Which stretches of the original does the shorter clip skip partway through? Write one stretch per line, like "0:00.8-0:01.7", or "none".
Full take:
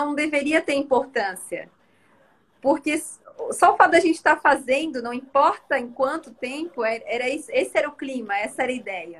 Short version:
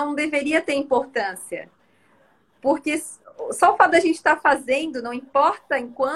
none